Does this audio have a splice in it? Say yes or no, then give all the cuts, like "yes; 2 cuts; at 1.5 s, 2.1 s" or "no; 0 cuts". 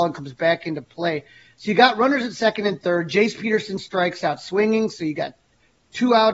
no; 0 cuts